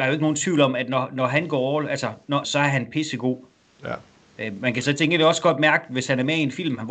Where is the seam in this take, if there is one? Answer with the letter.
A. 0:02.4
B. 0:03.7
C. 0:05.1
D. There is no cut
A